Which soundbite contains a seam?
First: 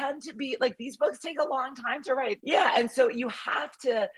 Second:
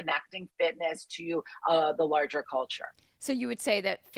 first; 1 cut; at 2.4 s

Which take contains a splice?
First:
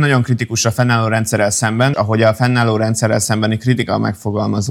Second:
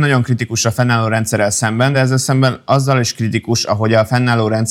first; 1 cut; at 1.9 s

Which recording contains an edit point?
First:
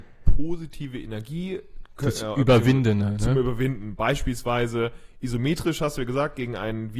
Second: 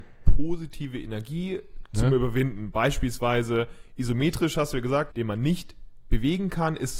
second; 2 cuts; at 1.9 s, 5.1 s

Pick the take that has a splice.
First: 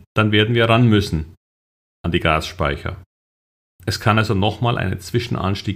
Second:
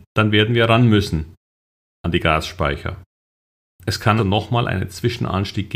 second; 1 cut; at 4.2 s

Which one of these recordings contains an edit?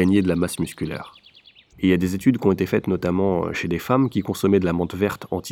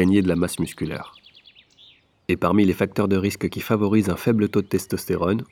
first; 1 cut; at 1.7 s

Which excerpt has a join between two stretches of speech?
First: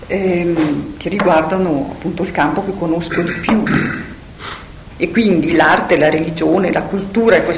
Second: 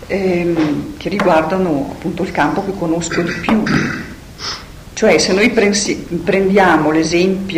first; 1 cut; at 4.9 s

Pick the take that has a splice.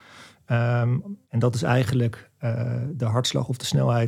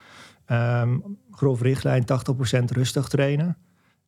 first; 1 cut; at 1.2 s

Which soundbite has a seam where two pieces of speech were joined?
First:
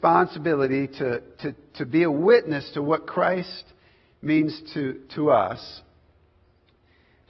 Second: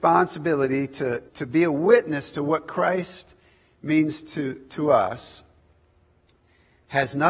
second; 1 cut; at 1.3 s

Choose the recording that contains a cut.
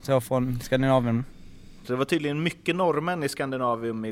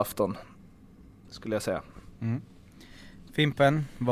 first; 1 cut; at 1.8 s

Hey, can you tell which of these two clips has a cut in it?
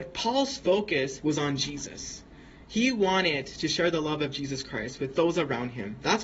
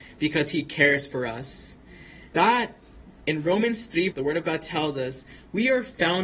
second; 2 cuts; at 2.3 s, 4.1 s

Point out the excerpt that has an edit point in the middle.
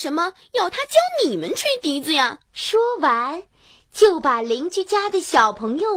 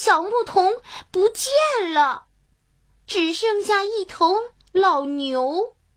first; 1 cut; at 2.5 s

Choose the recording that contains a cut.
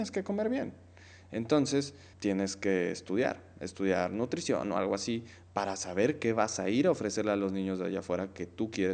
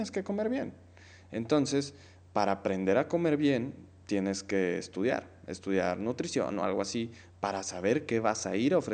first; 1 cut; at 2.1 s

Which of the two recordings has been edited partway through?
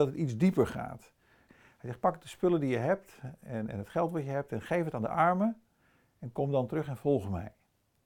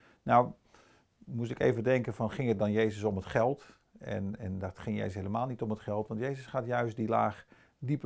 first; 1 cut; at 1.5 s

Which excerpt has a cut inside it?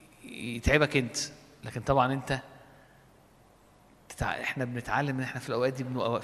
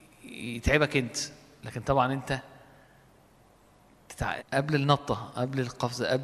second; 1 cut; at 4.4 s

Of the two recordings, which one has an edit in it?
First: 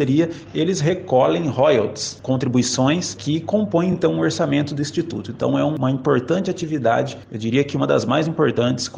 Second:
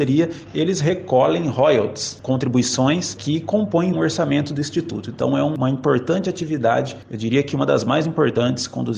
second; 1 cut; at 3.9 s

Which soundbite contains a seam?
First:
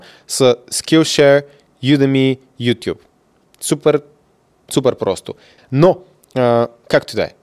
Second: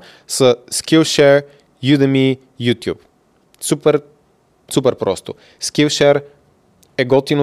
first; 1 cut; at 5.6 s

